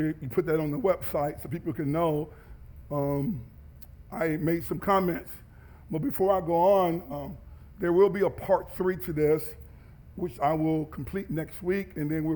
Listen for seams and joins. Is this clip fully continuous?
no; 2 cuts; at 2.9 s, 7.1 s

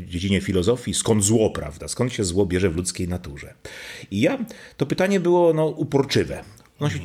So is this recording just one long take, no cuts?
yes; 0 cuts

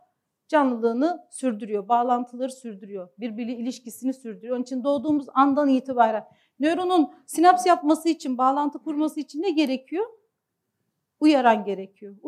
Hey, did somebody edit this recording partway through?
no; 0 cuts

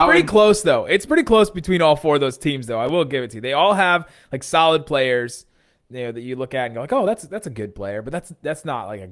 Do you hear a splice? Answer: no; 0 cuts

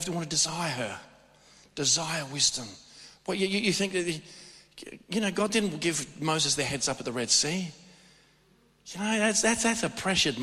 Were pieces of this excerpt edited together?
no; 0 cuts

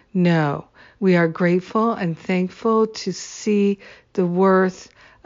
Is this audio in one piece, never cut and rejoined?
no; 1 cut; at 0.9 s

